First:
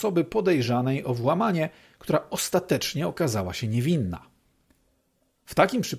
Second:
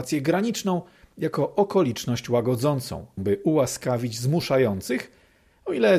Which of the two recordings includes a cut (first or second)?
second